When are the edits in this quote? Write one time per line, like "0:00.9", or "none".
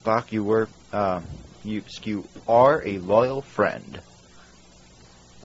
0:02.0